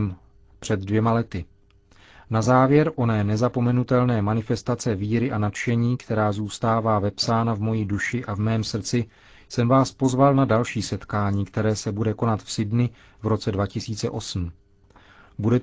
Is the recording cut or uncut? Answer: uncut